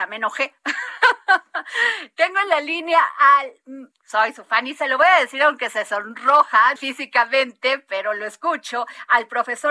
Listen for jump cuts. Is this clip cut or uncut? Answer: cut